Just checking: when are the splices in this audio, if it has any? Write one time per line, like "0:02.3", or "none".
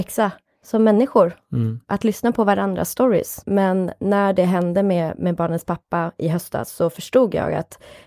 0:03.4